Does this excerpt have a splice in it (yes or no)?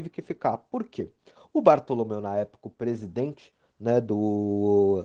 no